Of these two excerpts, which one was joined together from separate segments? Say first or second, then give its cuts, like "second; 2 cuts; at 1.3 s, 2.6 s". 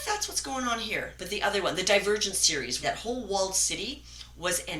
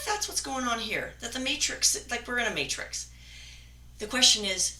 first; 2 cuts; at 1.2 s, 2.8 s